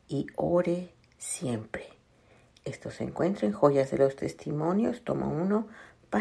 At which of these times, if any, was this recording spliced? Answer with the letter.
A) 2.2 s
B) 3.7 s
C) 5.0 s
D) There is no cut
D